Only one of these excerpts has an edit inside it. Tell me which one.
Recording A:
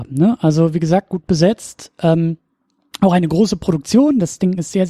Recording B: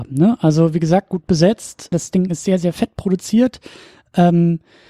B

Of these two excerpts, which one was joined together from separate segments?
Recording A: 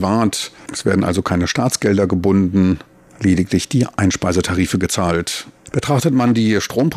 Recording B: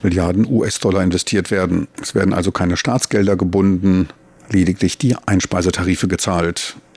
B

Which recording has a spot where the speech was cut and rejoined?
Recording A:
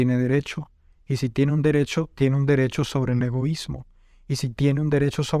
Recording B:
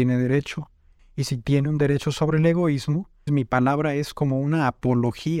B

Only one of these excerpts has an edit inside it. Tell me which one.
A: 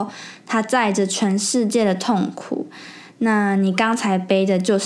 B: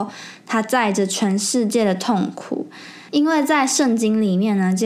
B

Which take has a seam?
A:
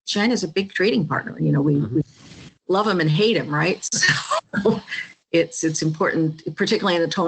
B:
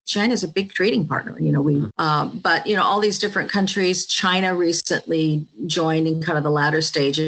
B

